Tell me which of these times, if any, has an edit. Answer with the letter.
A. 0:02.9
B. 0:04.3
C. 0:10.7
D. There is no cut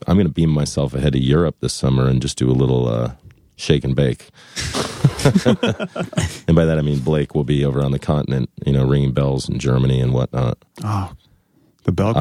D